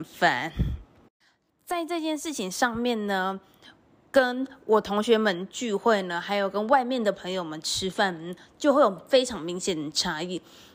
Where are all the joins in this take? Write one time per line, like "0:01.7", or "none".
none